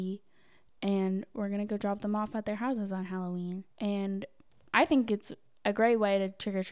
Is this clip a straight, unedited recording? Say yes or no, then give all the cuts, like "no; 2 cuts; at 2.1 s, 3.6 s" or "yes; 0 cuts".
no; 1 cut; at 3.7 s